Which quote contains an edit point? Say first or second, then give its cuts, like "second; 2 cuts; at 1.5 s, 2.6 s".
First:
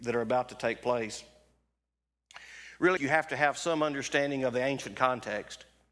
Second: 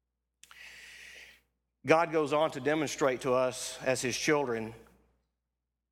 first; 1 cut; at 3.0 s